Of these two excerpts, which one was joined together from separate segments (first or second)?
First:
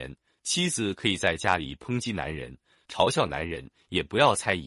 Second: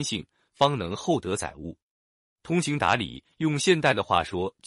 first